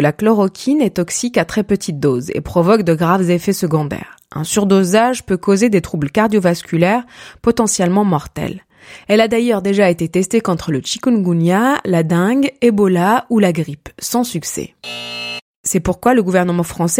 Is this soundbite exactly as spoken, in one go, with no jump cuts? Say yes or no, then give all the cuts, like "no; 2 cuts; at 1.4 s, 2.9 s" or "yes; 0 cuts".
yes; 0 cuts